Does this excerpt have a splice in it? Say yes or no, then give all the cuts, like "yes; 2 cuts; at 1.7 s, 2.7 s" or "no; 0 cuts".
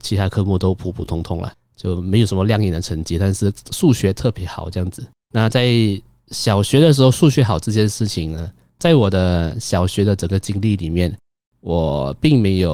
no; 0 cuts